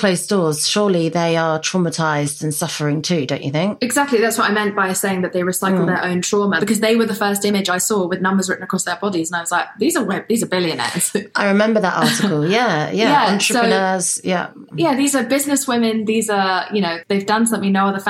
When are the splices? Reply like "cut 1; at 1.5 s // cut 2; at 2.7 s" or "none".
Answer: cut 1; at 6.6 s // cut 2; at 17.0 s